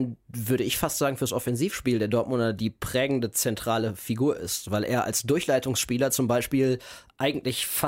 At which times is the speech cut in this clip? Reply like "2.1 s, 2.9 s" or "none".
none

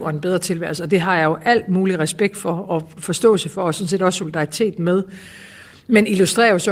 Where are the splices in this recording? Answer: none

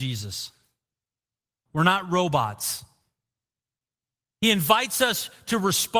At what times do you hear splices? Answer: 1.7 s

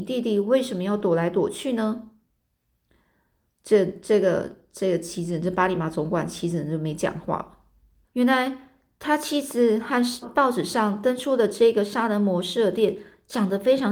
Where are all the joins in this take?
8.0 s, 10.2 s

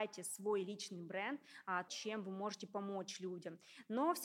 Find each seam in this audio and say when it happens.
1.9 s

